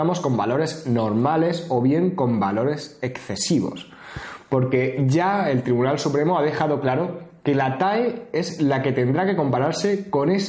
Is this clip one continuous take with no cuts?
yes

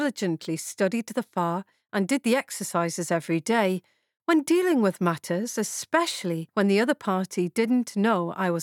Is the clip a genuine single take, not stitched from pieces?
yes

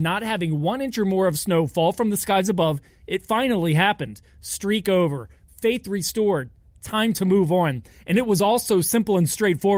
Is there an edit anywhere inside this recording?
no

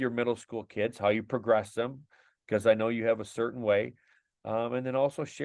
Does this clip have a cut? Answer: no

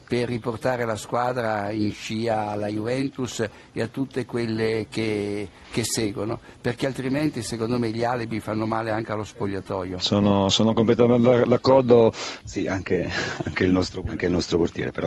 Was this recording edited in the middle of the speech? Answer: yes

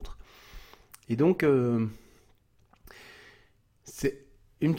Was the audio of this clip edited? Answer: no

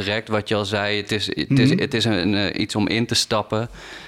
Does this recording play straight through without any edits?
yes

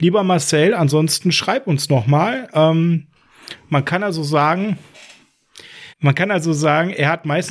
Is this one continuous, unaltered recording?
no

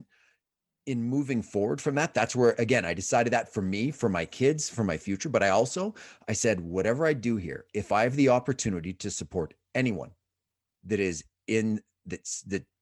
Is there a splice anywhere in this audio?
no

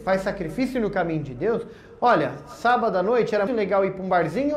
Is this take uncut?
no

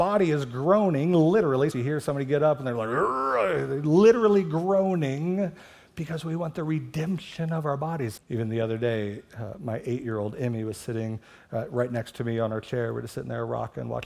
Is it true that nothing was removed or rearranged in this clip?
no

